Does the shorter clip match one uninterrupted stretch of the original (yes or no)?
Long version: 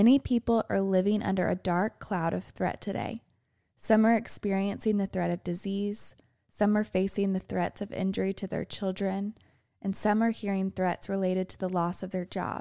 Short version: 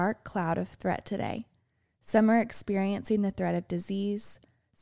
yes